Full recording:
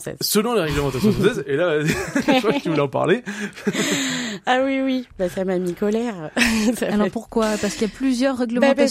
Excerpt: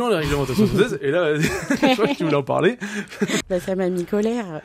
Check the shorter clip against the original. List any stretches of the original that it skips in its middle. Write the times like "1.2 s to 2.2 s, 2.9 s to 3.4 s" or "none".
3.9 s to 5.1 s